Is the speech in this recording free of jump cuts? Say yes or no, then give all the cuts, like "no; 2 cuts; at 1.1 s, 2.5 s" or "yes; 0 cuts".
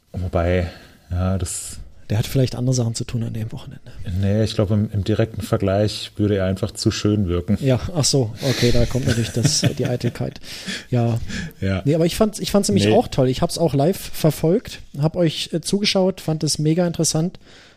no; 1 cut; at 3.5 s